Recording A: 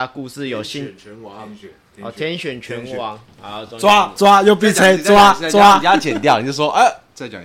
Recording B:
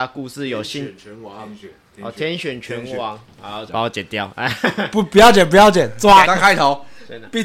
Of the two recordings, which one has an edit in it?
B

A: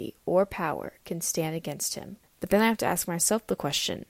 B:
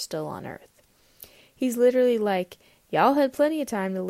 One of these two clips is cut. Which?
A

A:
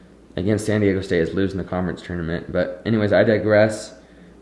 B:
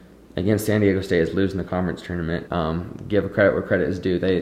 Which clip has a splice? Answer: B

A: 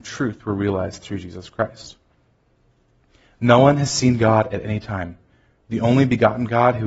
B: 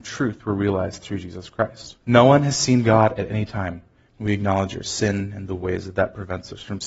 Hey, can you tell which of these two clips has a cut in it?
B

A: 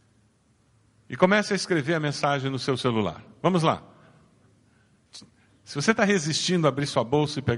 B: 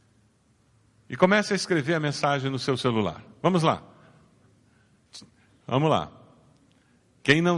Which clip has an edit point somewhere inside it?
B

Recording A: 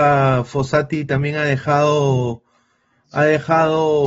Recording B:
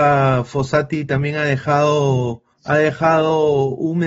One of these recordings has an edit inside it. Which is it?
B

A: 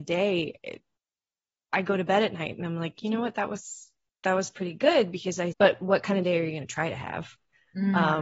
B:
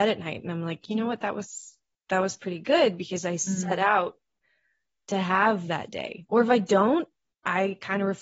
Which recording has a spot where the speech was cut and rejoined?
A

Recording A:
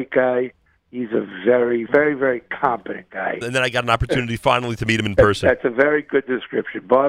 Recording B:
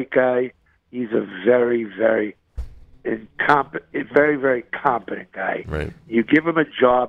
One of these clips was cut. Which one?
A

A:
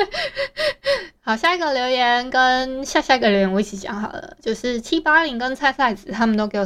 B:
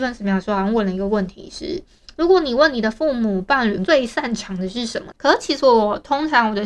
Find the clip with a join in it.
B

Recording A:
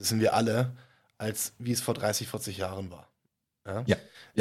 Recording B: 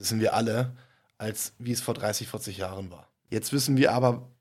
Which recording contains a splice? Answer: B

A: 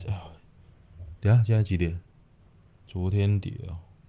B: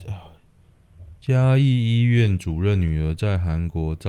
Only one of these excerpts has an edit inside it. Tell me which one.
B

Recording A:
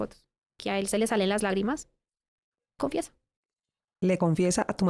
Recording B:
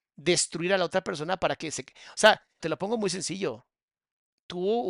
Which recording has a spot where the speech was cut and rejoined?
B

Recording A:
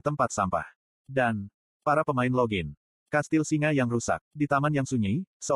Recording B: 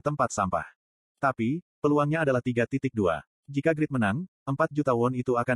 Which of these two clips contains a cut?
A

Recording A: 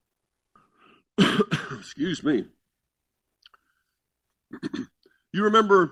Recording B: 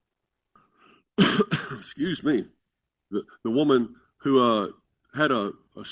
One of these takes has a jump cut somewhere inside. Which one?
B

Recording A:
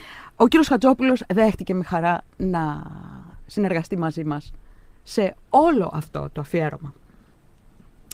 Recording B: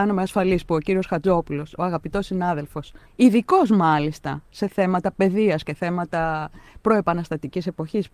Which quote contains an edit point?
B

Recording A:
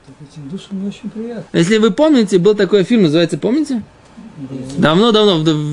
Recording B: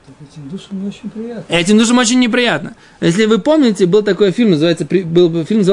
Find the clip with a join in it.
A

